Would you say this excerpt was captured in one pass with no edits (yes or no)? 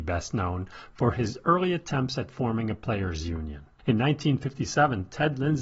yes